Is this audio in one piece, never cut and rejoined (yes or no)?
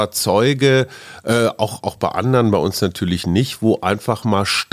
yes